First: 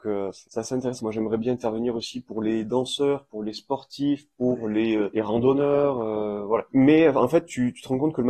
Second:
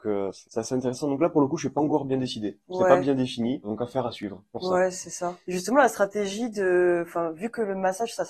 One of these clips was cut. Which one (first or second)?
first